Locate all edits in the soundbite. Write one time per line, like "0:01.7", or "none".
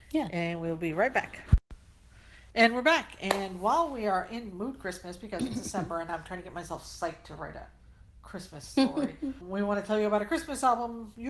0:09.4